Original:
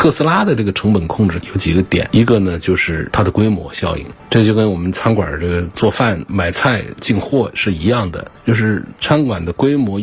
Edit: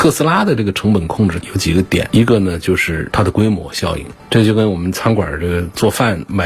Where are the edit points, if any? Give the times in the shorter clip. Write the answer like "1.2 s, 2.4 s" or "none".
none